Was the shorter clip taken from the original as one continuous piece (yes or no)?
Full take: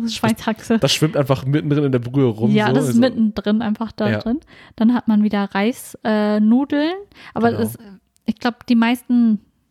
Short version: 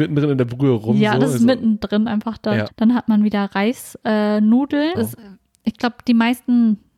no